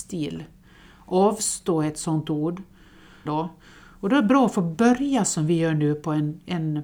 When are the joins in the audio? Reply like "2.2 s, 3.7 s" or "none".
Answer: 3.3 s

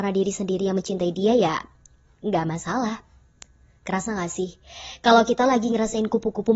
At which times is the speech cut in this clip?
none

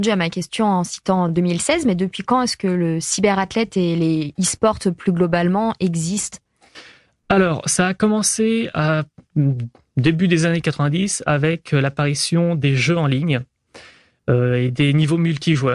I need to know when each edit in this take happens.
none

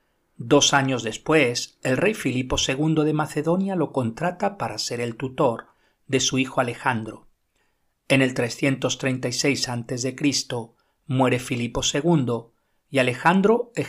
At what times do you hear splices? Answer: none

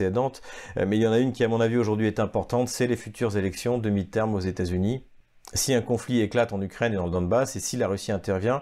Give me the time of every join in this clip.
none

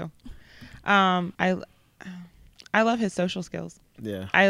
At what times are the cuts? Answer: 1.3 s

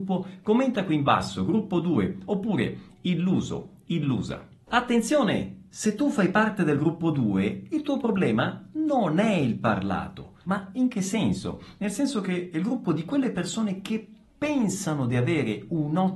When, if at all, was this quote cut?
10.4 s

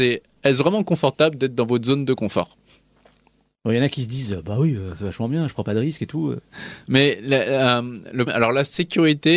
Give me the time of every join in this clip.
6.8 s, 8.3 s

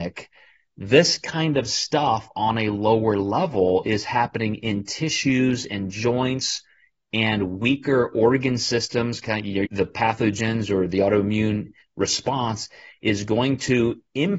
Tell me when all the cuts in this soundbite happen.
9.6 s

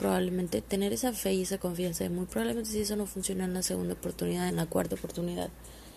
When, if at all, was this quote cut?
4.5 s

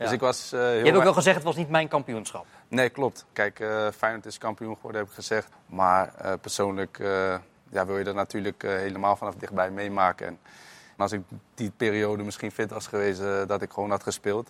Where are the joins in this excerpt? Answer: 3.3 s, 5.5 s, 11.0 s

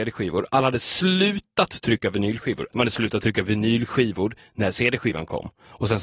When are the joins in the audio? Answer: 2.7 s

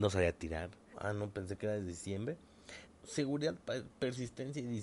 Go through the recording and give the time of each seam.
0.9 s, 2.9 s

